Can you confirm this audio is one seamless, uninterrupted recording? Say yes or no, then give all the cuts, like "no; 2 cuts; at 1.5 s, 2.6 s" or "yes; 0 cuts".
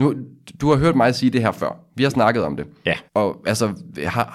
no; 1 cut; at 3.1 s